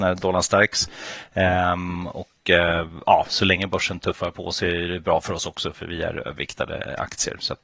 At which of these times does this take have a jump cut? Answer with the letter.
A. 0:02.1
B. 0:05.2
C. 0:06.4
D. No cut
D